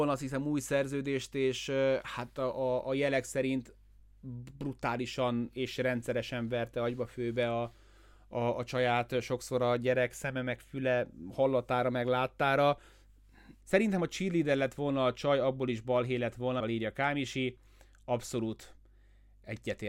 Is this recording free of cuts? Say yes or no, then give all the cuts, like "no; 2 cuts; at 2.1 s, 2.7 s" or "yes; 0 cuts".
no; 2 cuts; at 13.6 s, 16.6 s